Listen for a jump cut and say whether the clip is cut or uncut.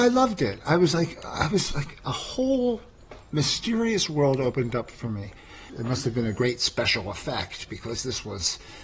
cut